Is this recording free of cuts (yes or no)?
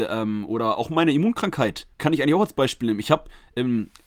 no